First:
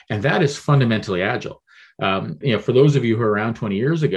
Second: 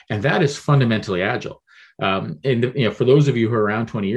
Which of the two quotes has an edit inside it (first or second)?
first